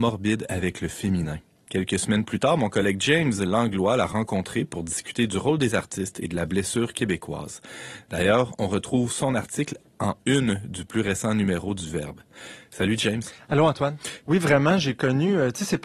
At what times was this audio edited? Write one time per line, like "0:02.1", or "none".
0:14.2